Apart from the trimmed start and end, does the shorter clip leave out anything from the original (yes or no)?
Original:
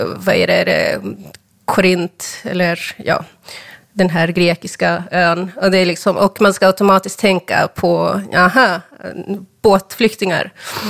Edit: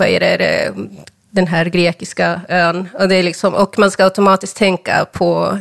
yes